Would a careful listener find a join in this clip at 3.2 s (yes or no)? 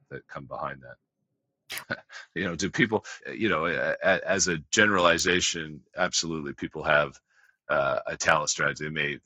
yes